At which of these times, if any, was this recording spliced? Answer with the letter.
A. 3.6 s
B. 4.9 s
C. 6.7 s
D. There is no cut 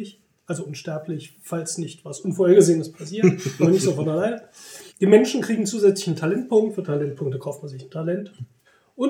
B